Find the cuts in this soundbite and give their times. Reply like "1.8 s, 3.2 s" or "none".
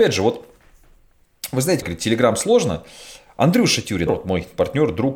1.8 s, 4.1 s